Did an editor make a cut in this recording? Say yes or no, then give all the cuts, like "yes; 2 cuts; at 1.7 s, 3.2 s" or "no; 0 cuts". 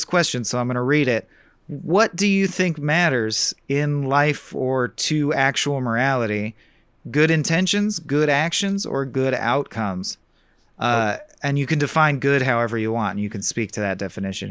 no; 0 cuts